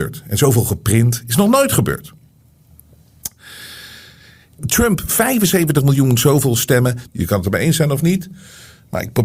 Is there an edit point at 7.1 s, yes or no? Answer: yes